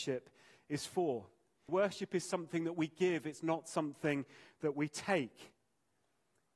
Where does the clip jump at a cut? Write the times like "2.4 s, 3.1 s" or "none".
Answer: 1.7 s